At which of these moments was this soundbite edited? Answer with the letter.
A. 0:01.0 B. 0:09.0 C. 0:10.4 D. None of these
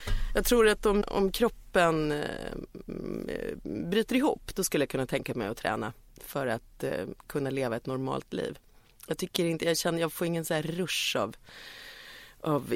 A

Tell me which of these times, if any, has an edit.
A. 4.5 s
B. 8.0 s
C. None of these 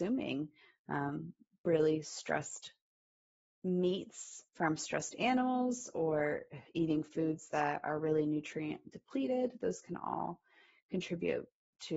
A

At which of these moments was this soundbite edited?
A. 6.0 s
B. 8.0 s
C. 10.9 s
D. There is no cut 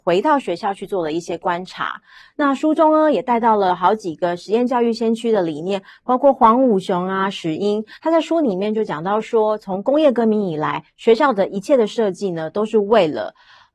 B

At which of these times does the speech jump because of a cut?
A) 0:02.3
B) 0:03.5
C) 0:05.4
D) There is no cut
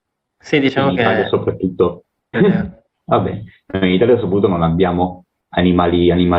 A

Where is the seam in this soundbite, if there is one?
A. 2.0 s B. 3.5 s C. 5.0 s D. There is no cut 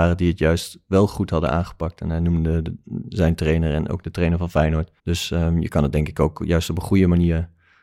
C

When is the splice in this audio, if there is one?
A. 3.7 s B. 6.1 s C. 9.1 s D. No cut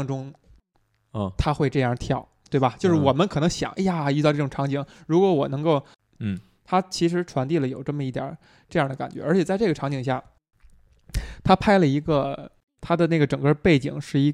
B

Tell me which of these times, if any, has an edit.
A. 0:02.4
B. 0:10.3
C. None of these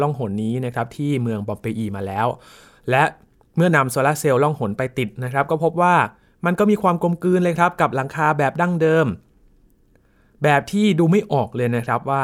C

